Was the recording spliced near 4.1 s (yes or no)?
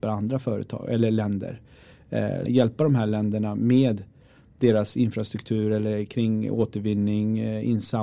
no